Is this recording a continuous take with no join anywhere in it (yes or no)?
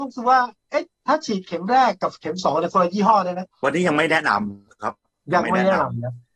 no